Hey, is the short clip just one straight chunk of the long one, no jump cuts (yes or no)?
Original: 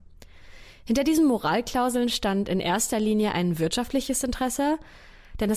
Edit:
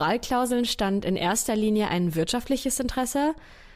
yes